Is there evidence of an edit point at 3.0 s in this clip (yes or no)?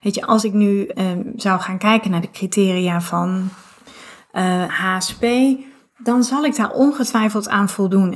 no